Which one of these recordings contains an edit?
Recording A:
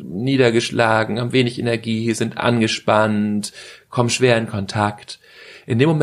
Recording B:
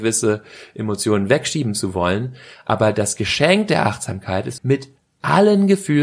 B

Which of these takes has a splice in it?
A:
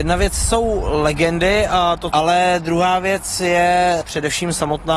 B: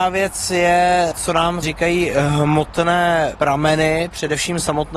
A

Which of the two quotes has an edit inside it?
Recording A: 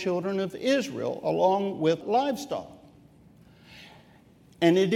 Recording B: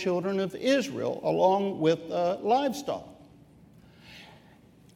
A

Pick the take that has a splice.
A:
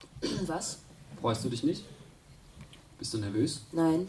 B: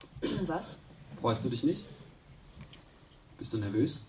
A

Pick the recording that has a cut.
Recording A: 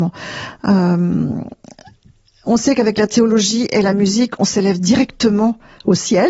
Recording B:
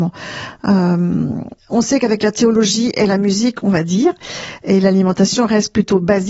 B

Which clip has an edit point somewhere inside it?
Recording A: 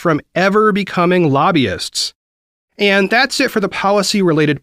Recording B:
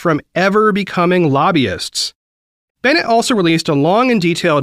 B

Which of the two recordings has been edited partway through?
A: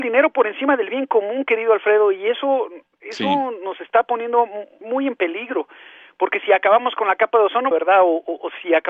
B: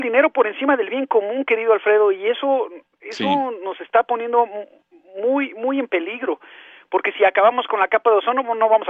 A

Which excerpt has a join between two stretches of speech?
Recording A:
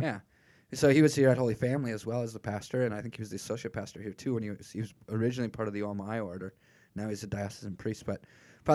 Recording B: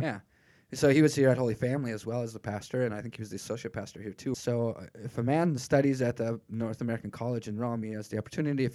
B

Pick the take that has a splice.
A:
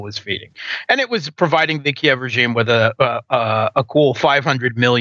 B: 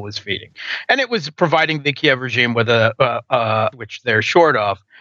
B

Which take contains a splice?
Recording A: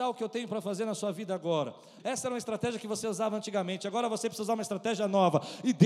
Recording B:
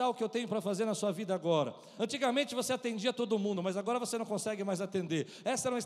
A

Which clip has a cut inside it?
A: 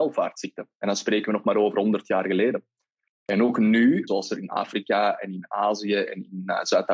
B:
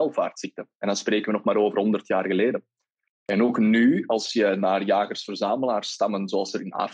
A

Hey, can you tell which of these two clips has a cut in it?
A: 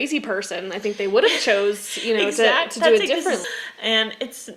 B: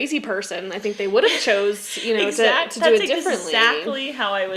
A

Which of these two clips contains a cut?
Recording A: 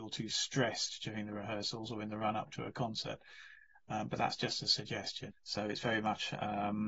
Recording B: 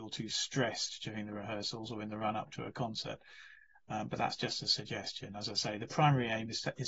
A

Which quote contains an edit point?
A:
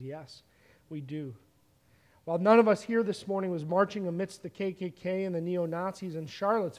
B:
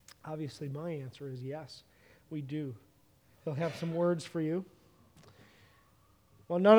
B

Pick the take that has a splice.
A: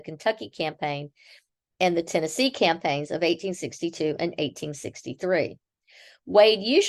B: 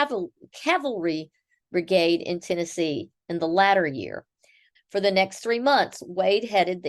B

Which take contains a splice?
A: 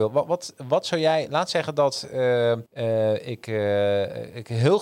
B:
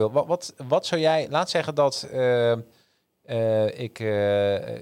A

